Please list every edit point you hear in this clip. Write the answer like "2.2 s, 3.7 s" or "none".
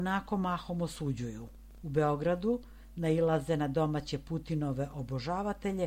1.8 s